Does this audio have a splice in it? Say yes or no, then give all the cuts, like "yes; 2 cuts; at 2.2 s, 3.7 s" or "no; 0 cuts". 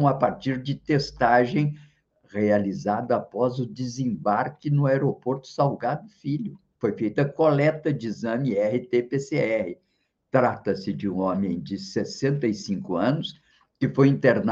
yes; 2 cuts; at 6.7 s, 10.2 s